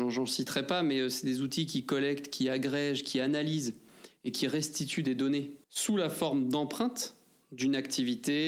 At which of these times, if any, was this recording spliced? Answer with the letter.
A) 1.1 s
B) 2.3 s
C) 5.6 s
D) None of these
C